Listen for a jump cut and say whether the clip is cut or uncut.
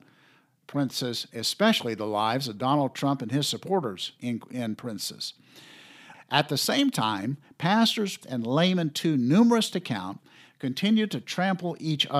cut